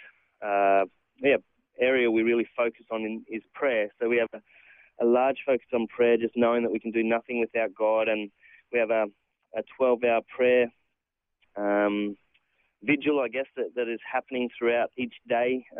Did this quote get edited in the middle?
no; 0 cuts

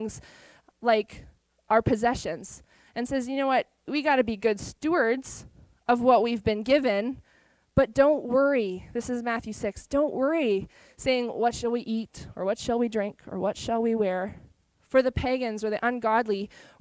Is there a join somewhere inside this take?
no; 0 cuts

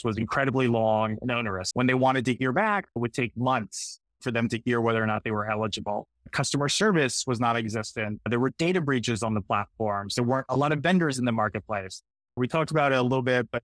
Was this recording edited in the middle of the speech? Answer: yes; 2 cuts; at 1.7 s, 12.4 s

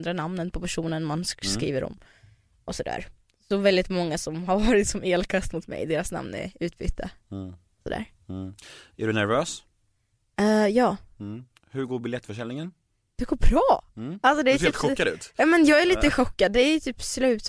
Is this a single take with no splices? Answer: yes; 0 cuts

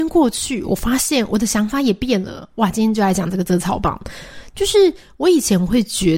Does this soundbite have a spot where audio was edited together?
no; 0 cuts

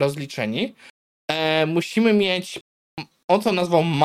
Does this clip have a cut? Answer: no; 0 cuts

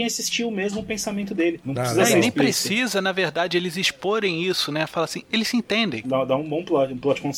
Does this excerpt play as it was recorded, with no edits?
no; 1 cut; at 6.0 s

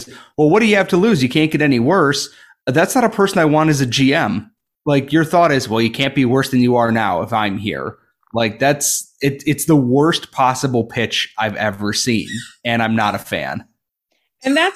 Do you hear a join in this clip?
no; 0 cuts

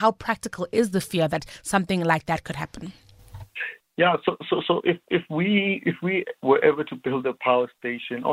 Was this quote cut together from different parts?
no; 0 cuts

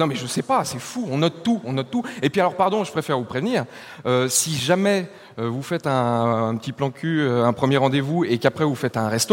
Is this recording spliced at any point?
no; 0 cuts

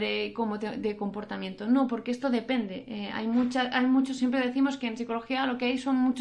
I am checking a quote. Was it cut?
no; 0 cuts

